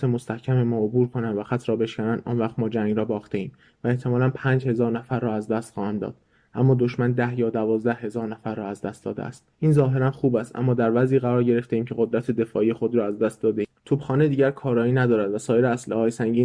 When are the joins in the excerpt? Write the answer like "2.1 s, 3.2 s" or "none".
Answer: 9.5 s